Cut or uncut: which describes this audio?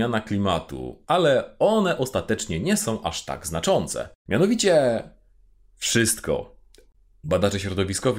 cut